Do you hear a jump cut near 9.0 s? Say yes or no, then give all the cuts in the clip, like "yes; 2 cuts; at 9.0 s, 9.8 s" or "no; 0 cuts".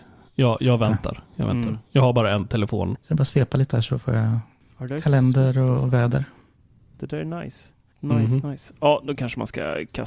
no; 1 cut; at 2.9 s